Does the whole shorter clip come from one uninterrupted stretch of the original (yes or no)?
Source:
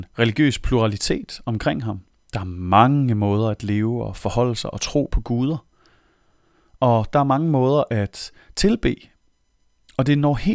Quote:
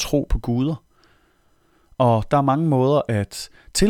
yes